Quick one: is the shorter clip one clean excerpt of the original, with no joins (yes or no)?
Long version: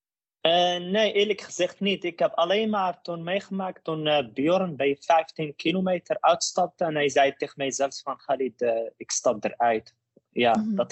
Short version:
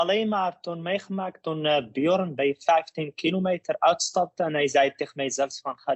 yes